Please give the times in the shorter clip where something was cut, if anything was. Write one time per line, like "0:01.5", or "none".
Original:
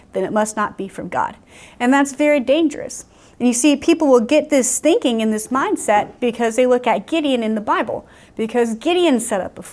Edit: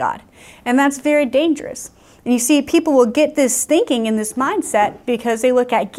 none